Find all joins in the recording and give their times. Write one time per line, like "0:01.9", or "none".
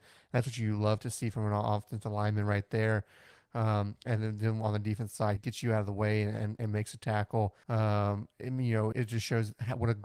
0:05.4
0:07.6
0:08.9